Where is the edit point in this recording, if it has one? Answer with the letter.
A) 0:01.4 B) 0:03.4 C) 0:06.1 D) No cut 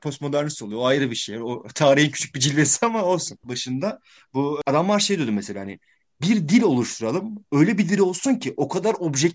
B